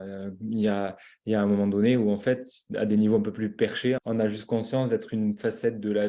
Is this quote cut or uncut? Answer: cut